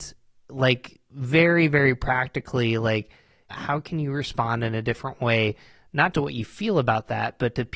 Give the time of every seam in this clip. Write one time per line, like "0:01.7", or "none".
0:03.5
0:06.1